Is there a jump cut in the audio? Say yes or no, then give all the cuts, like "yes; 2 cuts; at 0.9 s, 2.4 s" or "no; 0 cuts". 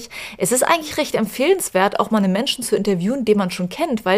no; 0 cuts